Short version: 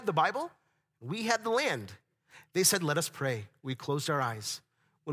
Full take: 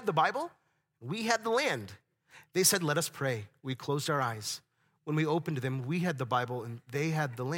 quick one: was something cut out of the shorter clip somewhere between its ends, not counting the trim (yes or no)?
no